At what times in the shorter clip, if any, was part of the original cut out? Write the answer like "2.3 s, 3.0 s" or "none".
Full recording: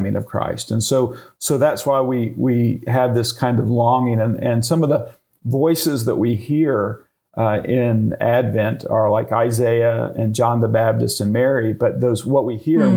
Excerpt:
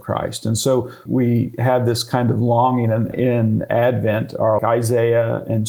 1.1 s, 3.1 s, 4.6 s